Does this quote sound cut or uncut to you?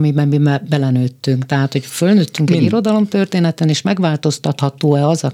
uncut